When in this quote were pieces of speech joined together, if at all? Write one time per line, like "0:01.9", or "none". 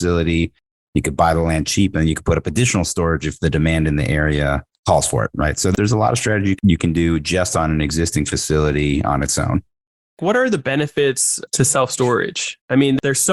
none